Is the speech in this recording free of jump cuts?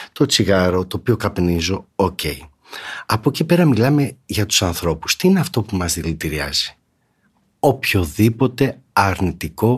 yes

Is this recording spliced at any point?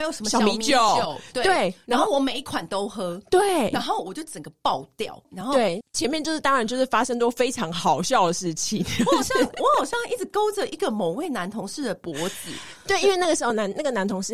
yes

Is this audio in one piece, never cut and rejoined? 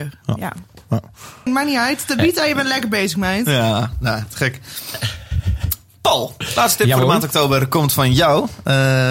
no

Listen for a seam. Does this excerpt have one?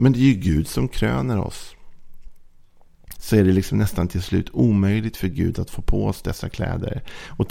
yes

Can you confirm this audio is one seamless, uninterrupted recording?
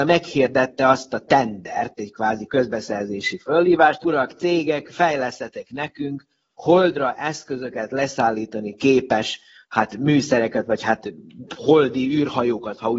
no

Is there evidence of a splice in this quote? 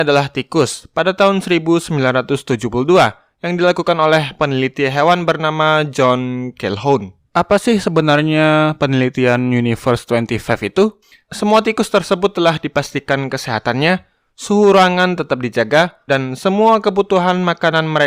yes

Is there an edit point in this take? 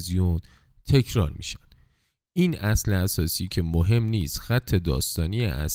no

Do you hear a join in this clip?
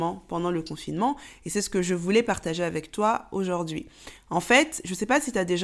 no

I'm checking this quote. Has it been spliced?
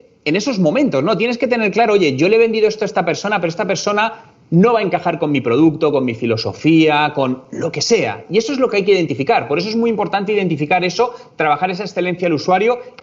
no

